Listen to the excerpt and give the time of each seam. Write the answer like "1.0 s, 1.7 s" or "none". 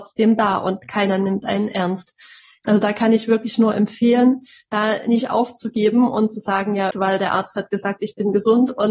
6.9 s